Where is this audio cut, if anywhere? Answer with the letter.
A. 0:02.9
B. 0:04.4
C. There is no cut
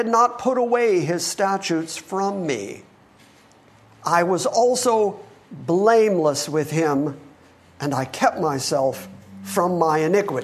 C